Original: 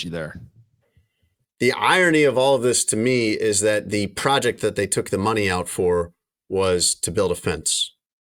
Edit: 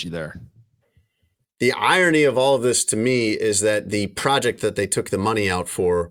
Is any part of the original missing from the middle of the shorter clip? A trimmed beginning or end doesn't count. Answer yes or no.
no